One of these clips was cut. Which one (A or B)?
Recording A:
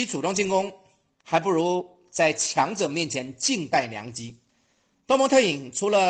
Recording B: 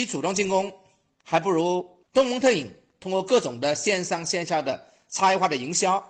B